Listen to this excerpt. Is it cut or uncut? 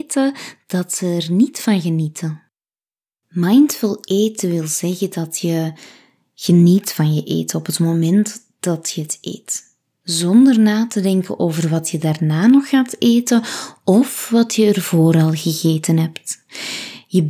uncut